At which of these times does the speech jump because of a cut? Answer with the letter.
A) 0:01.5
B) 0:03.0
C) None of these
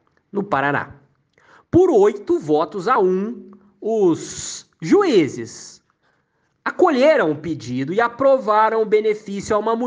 C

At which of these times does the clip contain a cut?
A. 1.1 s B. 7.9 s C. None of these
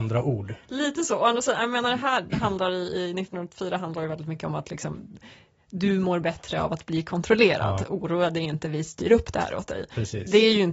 C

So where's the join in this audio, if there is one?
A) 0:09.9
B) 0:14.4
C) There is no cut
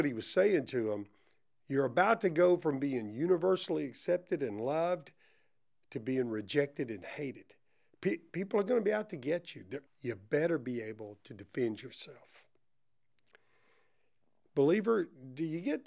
A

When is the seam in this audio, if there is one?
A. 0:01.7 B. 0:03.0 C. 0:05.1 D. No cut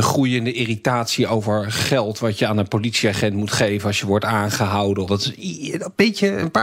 C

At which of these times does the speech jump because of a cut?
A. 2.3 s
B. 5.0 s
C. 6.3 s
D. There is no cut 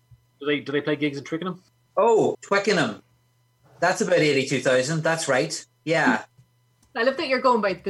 A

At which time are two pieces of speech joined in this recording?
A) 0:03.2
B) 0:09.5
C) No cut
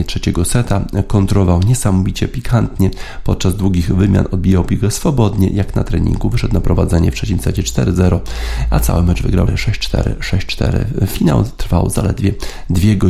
B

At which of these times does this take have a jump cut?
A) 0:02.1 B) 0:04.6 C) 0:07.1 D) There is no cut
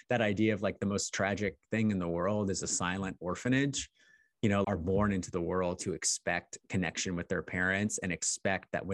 B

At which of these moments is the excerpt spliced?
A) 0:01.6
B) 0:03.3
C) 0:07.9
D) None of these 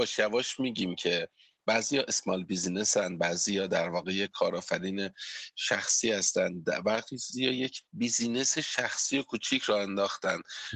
C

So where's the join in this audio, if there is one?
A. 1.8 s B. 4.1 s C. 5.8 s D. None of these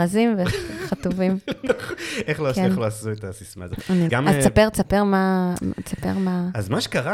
B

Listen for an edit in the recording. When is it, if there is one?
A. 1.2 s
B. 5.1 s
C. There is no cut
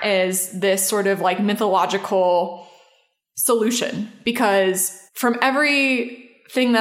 B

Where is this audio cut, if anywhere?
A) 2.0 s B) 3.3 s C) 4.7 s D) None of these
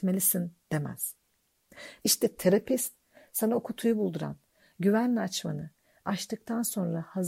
A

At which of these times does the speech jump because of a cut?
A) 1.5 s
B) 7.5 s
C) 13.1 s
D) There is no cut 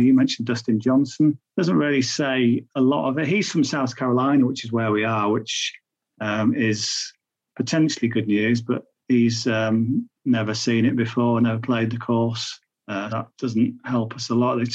C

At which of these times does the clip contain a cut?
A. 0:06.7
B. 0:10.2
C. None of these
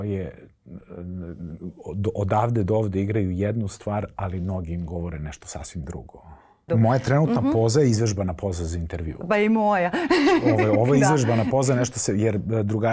A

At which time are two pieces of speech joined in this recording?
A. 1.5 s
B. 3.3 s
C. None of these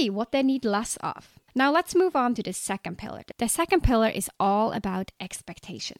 A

